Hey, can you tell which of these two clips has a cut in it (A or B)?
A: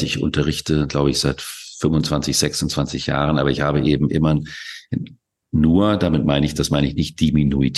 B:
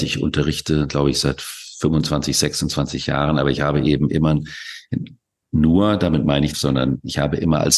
B